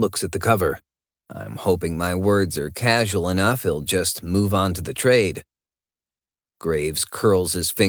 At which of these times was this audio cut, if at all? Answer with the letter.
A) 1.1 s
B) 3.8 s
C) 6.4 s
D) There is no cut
A